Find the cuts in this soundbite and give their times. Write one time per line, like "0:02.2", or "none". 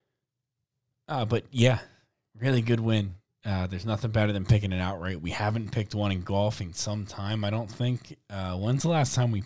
0:06.7